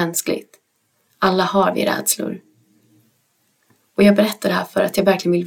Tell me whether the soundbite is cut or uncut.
uncut